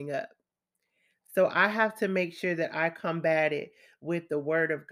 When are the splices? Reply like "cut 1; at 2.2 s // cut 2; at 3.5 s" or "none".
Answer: none